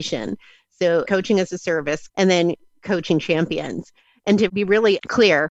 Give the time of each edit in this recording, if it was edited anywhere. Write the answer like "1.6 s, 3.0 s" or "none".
1.0 s, 2.1 s